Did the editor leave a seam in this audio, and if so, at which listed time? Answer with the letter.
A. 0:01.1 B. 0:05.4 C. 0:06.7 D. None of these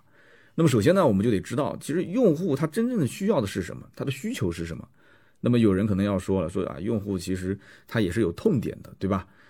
D